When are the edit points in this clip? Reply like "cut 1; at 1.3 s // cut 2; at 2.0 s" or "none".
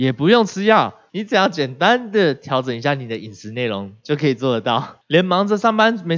cut 1; at 1.1 s